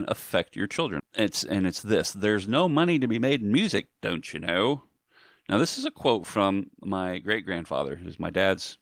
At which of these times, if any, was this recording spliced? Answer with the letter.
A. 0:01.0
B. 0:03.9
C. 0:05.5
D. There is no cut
A